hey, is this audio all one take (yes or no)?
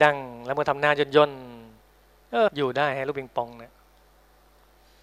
no